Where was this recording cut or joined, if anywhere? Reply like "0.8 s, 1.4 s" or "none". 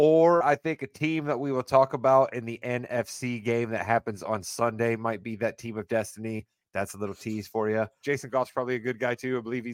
8.0 s